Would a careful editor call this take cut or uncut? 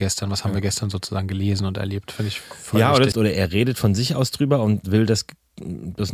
cut